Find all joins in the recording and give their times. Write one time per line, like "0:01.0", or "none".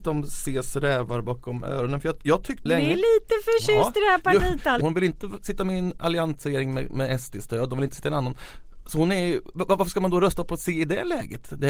0:02.7
0:04.8